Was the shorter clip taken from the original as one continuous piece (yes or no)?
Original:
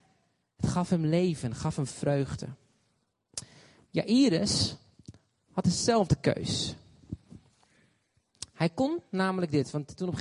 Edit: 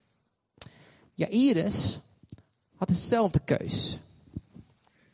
yes